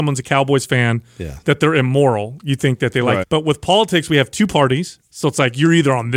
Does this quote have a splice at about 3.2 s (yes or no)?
yes